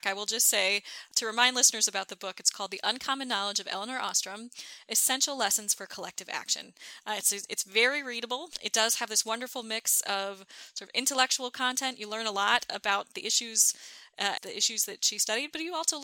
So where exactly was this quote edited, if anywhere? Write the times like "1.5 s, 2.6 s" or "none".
14.4 s